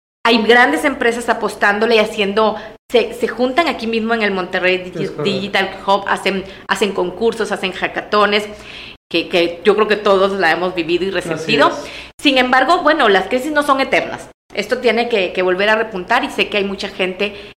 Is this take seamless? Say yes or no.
no